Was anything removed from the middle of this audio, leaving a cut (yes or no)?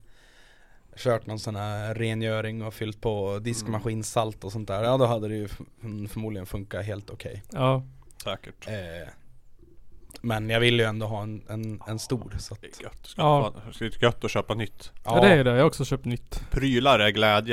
no